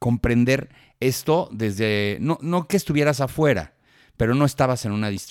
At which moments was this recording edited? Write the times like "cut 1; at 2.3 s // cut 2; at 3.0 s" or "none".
none